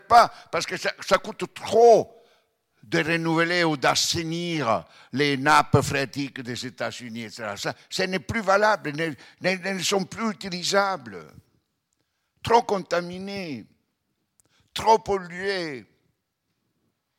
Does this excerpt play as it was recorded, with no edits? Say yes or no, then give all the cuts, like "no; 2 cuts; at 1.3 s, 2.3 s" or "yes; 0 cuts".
yes; 0 cuts